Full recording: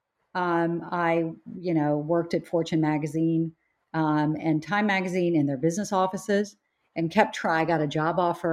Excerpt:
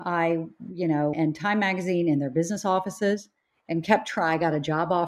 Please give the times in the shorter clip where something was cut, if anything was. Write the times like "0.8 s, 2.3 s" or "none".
1.1 s

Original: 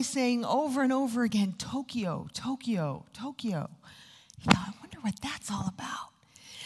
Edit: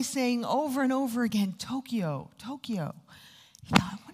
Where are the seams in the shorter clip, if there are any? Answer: 1.6 s

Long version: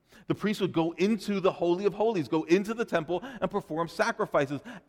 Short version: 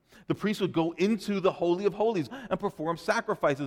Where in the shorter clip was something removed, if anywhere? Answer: 2.3 s

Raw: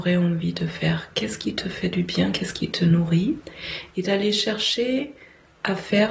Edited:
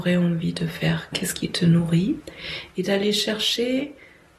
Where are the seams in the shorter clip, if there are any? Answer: 1.1 s

